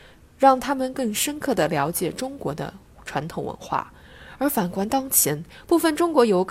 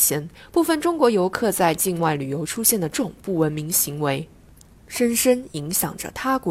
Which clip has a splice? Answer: second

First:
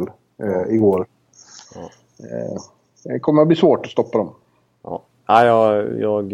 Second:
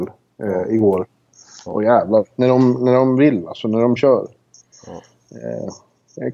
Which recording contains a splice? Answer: first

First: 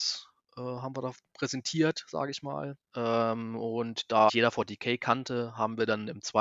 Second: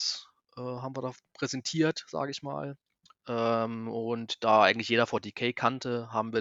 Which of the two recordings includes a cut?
first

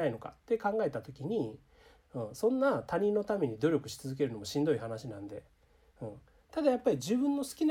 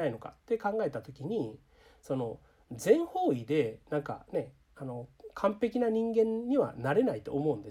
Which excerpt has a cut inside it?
first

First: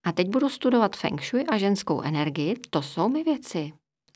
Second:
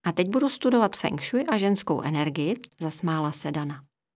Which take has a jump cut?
second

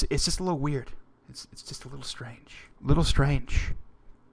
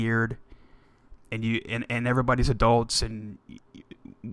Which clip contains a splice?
first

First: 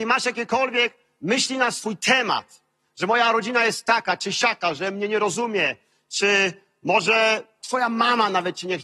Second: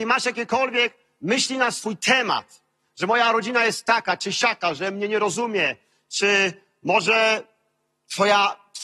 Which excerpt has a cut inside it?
first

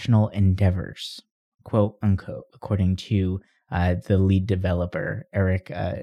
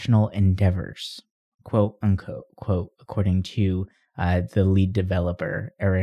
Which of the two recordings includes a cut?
first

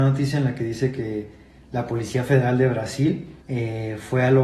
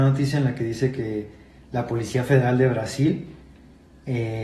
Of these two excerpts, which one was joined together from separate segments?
first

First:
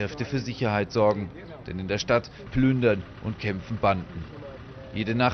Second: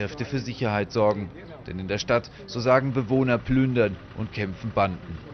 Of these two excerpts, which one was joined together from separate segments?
first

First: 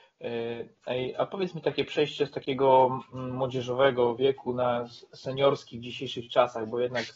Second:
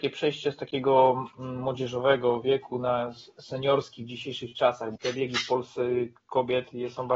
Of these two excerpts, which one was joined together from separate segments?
second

